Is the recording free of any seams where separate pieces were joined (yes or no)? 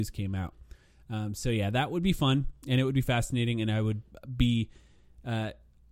yes